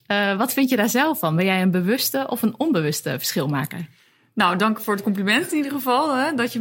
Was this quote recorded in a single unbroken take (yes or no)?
yes